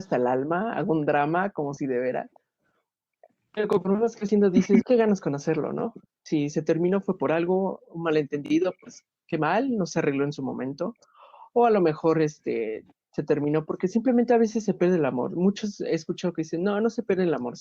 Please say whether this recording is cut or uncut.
cut